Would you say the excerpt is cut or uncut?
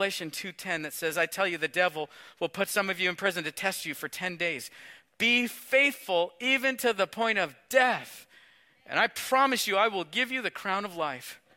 uncut